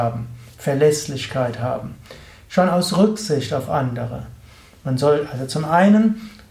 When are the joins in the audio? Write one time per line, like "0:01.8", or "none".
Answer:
none